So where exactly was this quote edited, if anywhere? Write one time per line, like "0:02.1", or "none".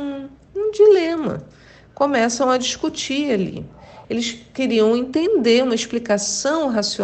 0:04.0